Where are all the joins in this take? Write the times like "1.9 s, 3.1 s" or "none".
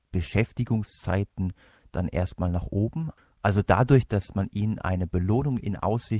none